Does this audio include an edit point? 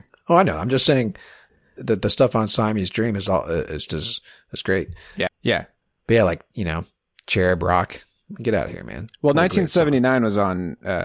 yes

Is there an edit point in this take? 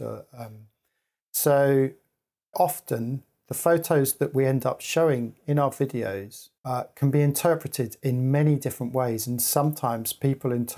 yes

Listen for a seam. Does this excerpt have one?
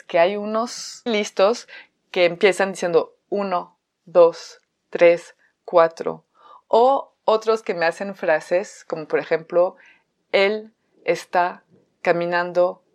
yes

